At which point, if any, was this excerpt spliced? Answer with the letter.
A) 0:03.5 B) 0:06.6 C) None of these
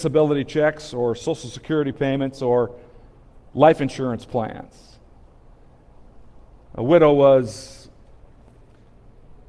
C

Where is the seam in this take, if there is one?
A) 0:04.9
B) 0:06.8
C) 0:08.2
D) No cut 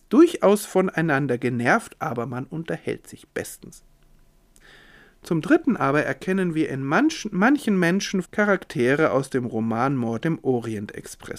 C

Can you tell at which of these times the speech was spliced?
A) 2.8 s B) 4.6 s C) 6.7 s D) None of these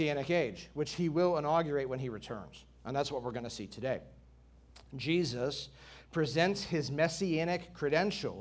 D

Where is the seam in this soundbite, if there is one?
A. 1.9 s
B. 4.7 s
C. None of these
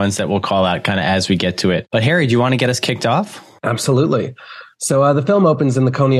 C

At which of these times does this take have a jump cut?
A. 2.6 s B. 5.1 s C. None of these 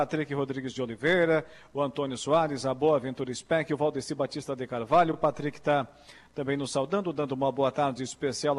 C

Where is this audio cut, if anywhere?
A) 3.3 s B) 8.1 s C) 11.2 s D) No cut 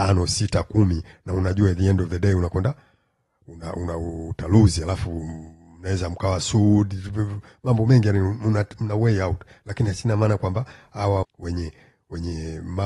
C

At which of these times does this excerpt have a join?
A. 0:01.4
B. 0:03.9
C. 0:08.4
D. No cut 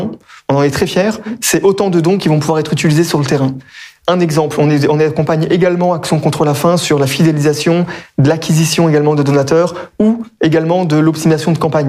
D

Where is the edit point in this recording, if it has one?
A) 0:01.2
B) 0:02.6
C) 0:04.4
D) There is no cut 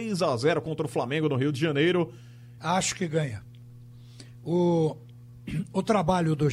B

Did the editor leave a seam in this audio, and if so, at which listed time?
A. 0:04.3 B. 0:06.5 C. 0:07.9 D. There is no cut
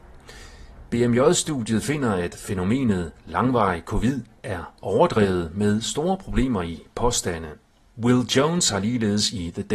C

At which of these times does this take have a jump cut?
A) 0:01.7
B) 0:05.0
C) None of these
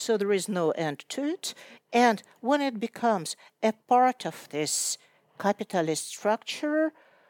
A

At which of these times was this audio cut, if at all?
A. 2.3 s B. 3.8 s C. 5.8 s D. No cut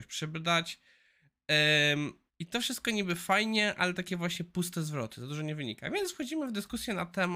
A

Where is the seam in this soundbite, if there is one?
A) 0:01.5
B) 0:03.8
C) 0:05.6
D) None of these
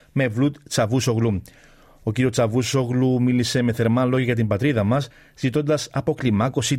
D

